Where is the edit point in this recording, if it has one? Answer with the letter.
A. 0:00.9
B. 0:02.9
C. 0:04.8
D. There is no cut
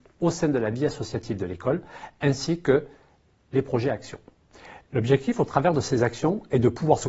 C